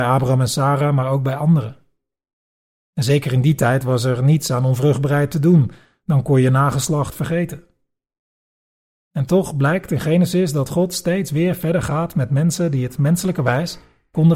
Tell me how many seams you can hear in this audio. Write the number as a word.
zero